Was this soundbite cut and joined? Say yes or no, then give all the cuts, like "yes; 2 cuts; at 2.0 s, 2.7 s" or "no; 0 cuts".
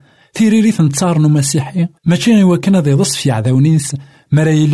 yes; 1 cut; at 2.0 s